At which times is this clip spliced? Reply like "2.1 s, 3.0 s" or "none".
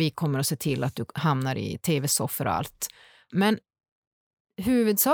3.3 s

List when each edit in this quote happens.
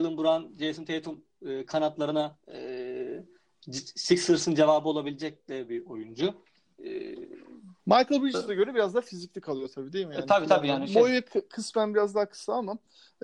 7.8 s

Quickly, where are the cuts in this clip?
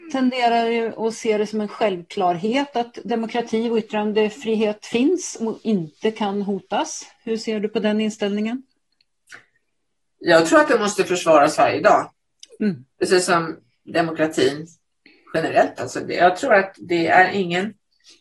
12.9 s

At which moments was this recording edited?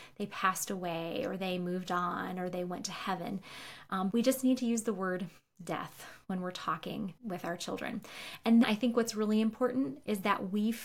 4.1 s, 7.2 s, 8.6 s

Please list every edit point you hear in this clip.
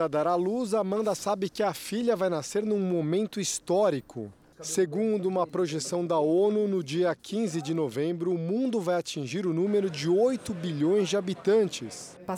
none

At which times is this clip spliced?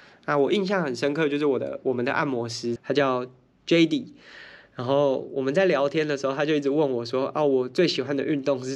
2.8 s

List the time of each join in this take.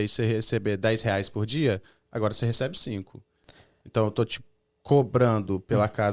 none

